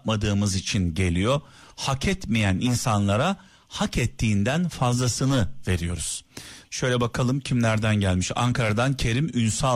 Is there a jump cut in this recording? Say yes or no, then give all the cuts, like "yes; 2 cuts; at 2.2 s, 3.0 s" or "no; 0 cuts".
yes; 1 cut; at 6.6 s